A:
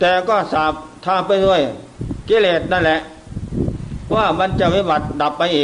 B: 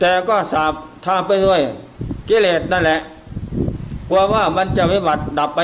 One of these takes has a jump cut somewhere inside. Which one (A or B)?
A